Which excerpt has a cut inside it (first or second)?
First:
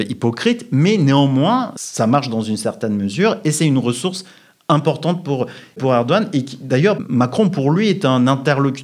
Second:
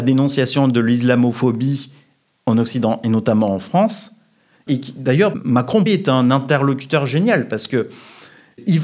second